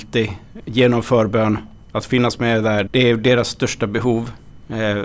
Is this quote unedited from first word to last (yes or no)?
no